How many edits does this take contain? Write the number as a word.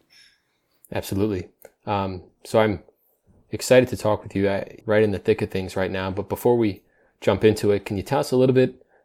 one